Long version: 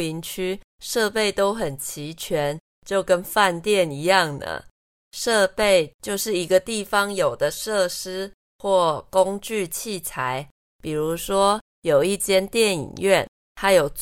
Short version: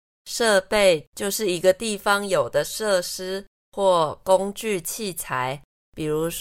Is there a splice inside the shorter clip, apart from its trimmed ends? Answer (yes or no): no